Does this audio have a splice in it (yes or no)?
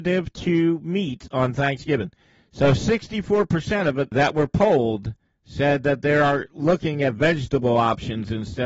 yes